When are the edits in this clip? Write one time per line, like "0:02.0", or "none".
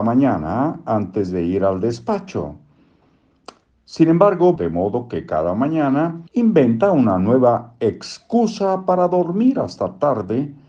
0:04.6
0:06.3